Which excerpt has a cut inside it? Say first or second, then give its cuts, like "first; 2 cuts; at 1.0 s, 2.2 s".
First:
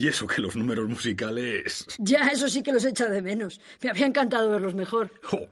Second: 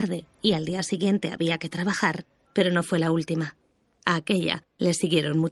second; 1 cut; at 2.4 s